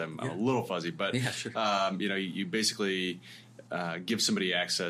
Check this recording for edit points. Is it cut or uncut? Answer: uncut